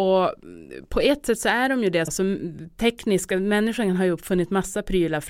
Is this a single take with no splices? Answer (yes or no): no